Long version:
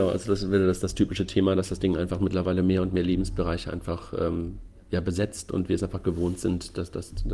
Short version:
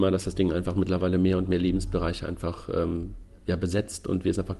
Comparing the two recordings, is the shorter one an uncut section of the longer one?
yes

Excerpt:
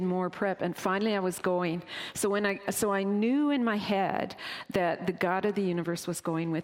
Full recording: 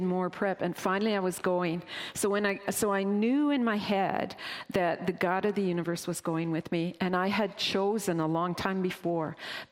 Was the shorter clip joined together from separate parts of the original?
no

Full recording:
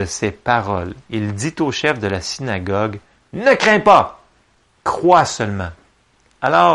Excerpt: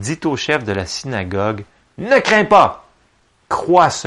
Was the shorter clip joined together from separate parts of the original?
no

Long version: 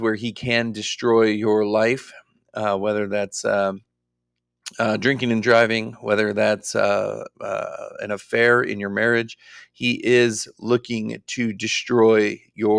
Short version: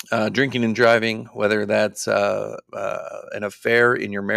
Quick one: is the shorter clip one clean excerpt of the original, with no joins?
yes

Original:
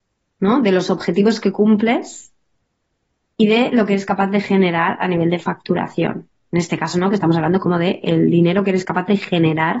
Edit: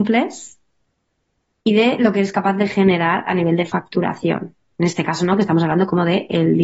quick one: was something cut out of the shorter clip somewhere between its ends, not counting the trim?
no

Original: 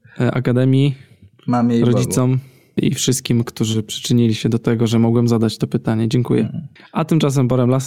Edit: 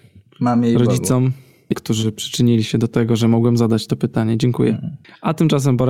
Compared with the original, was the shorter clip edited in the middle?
yes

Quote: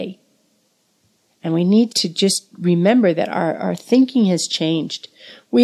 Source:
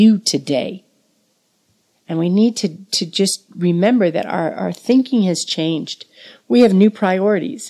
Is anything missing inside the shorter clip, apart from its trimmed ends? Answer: yes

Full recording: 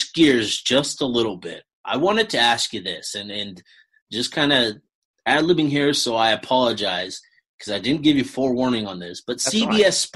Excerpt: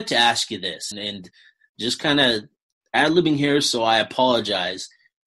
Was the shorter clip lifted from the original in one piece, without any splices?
no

